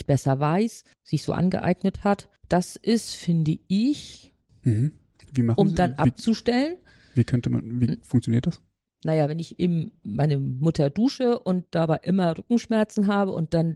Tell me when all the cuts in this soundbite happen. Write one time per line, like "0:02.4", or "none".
0:00.9
0:02.4
0:04.5